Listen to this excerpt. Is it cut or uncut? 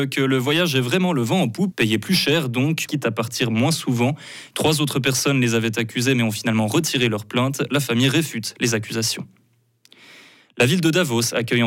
cut